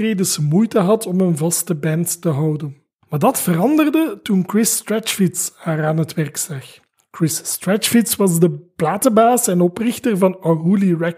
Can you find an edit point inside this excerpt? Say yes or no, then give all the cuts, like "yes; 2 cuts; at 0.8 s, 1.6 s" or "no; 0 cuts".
no; 0 cuts